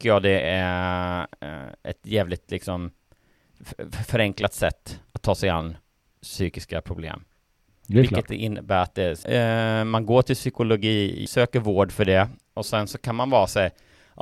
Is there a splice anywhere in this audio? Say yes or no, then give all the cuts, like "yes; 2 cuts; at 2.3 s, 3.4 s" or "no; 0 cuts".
yes; 3 cuts; at 7.7 s, 9.2 s, 11.3 s